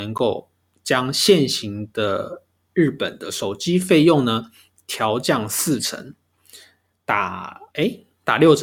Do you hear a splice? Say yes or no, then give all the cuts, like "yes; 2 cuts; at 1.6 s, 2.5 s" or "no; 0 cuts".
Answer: yes; 1 cut; at 7.7 s